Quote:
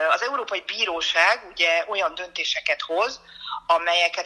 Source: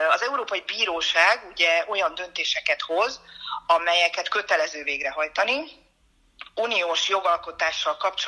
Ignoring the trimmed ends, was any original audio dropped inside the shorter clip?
no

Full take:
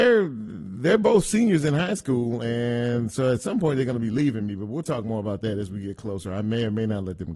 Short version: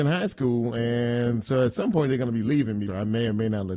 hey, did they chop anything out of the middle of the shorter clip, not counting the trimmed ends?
yes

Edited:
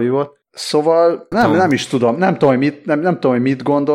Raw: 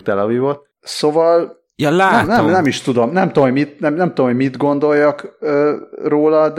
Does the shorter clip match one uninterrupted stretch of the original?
no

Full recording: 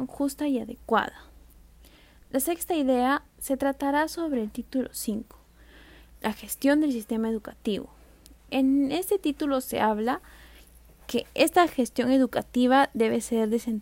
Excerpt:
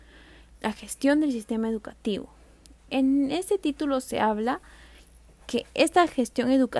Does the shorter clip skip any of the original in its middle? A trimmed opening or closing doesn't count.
no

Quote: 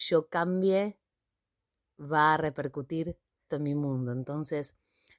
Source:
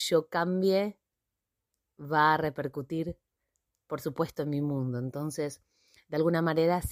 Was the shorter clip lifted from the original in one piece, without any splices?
no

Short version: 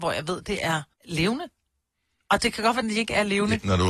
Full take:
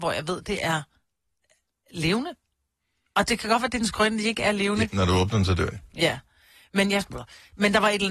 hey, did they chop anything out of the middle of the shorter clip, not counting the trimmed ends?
yes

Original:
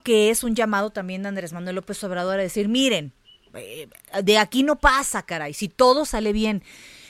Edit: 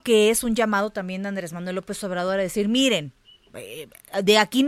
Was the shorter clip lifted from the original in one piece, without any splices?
yes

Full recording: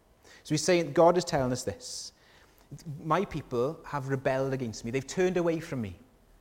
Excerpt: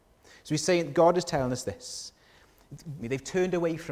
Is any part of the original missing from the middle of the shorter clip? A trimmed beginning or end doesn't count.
yes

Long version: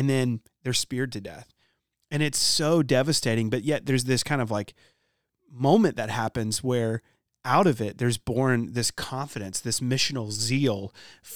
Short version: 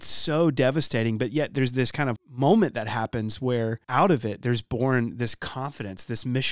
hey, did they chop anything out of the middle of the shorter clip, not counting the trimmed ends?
yes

